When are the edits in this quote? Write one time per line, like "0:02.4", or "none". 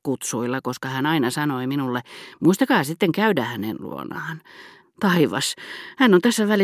0:04.8